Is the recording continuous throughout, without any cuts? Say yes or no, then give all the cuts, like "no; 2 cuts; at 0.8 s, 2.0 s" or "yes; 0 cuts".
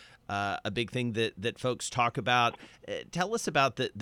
yes; 0 cuts